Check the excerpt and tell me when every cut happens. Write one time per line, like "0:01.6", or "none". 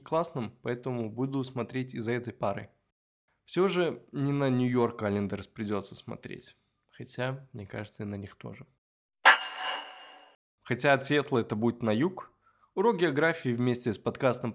0:10.5